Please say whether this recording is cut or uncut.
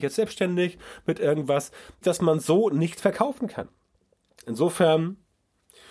cut